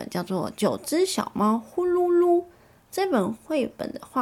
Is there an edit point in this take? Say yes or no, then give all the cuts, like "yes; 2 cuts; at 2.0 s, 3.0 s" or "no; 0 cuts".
no; 0 cuts